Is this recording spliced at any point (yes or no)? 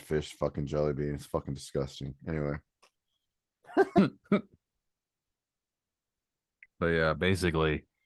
no